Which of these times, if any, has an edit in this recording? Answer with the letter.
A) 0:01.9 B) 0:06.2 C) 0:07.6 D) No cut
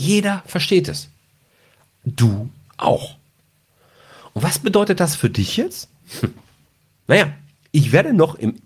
D